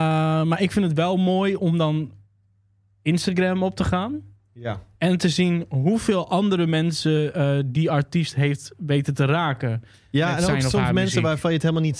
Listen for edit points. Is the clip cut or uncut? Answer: uncut